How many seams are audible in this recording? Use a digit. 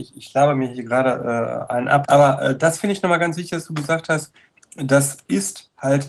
1